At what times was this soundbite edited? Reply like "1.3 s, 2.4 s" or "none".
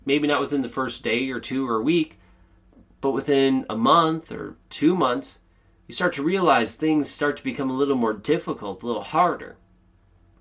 none